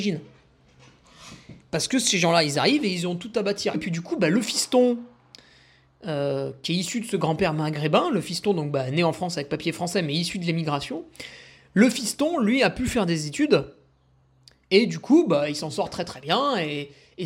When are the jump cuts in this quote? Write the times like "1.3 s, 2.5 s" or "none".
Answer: 3.7 s